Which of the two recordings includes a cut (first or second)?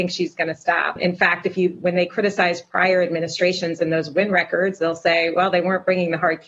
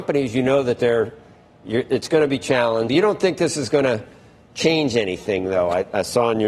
second